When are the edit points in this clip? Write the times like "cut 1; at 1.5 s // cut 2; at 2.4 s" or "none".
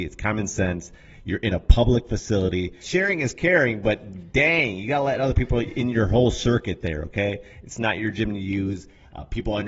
cut 1; at 2.8 s